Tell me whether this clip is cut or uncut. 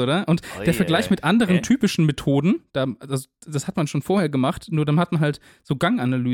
uncut